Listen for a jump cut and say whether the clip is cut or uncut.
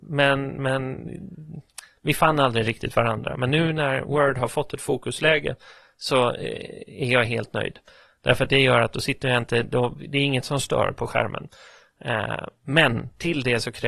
uncut